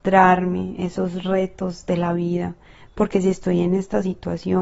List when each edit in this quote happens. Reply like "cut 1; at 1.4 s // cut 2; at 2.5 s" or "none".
cut 1; at 2.9 s